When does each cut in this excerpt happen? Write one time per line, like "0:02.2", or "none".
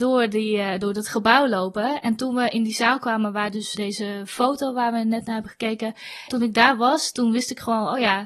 0:03.7
0:06.3